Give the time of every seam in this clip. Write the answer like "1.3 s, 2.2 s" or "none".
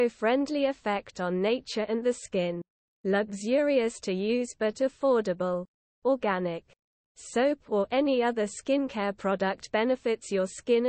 none

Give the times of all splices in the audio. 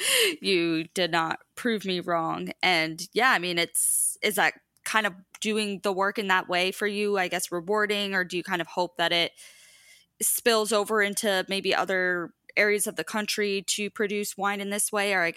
none

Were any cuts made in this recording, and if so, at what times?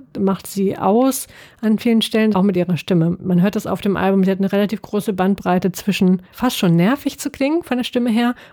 2.3 s, 6.3 s

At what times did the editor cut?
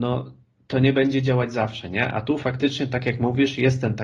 none

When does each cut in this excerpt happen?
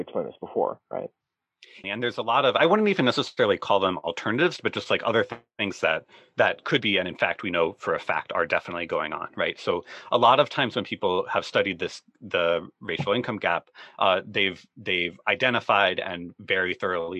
1.8 s

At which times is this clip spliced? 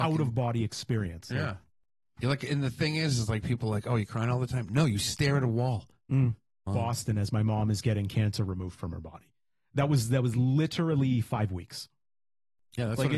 6.7 s

